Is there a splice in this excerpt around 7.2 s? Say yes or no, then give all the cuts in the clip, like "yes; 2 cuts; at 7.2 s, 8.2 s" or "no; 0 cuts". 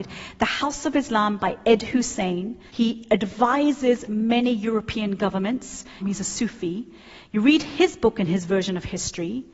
no; 2 cuts; at 2.7 s, 6.0 s